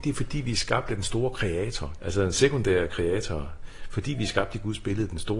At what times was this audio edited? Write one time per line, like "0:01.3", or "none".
0:02.0